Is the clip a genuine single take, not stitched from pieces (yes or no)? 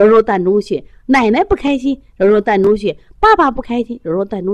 yes